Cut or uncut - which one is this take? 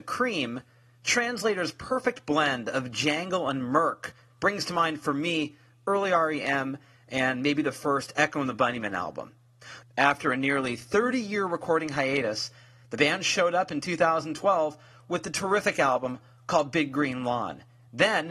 cut